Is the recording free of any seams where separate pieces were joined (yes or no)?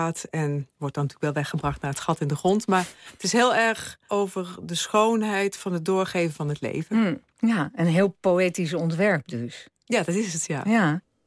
yes